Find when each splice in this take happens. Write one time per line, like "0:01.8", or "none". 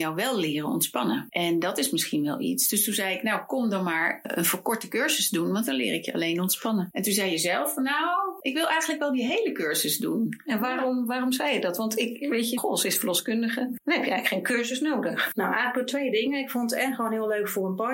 0:12.6